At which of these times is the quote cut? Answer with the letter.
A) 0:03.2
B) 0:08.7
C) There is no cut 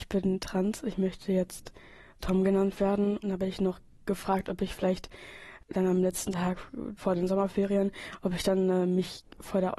A